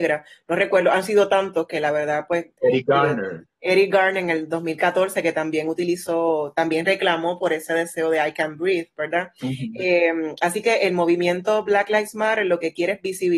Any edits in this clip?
no; 0 cuts

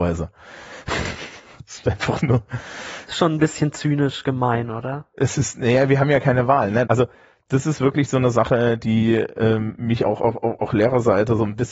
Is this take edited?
yes; 1 cut; at 6.9 s

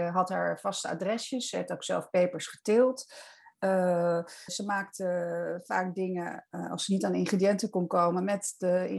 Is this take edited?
yes; 1 cut; at 4.5 s

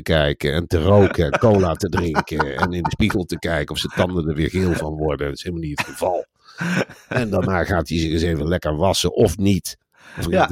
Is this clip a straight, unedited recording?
yes; 0 cuts

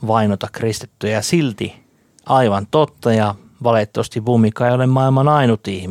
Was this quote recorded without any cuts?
yes; 0 cuts

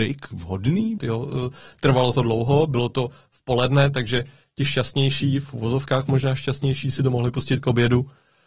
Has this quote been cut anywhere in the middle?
yes; 1 cut; at 1.0 s

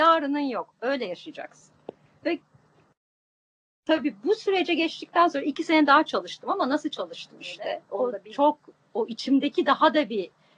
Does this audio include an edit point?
no; 0 cuts

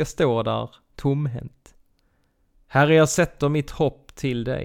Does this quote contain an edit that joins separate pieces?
yes; 1 cut; at 2.5 s

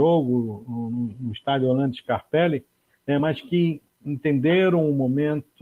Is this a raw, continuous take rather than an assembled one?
yes; 0 cuts

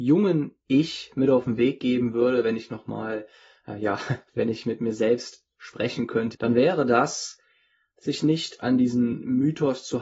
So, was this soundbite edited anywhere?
yes; 2 cuts; at 4.3 s, 6.3 s

